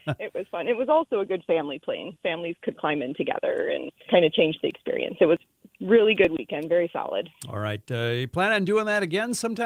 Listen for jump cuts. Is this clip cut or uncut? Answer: cut